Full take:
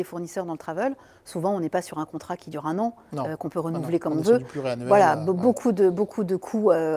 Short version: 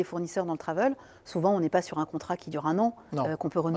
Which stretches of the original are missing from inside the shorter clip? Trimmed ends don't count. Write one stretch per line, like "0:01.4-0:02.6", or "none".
none